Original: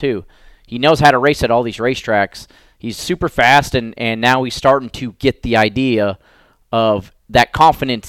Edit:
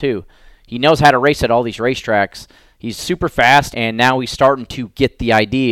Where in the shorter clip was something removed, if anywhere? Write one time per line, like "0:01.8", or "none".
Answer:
0:03.7